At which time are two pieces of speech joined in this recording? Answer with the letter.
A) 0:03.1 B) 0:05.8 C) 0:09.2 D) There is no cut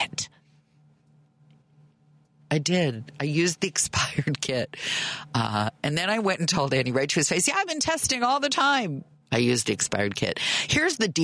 C